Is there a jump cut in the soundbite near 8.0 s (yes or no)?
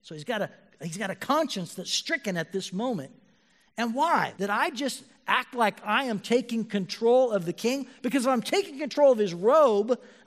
no